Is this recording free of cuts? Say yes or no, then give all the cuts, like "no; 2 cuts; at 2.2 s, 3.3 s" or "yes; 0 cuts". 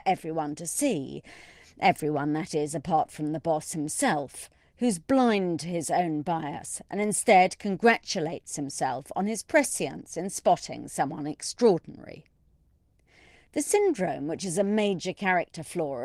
yes; 0 cuts